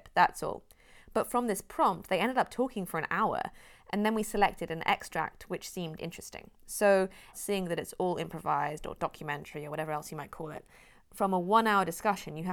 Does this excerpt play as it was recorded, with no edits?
no; 1 cut; at 7.3 s

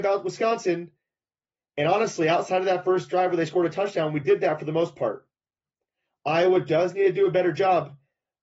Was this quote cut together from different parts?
no; 0 cuts

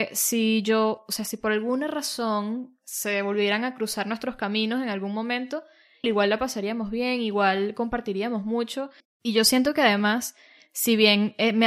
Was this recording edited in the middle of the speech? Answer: yes; 2 cuts; at 6.0 s, 9.0 s

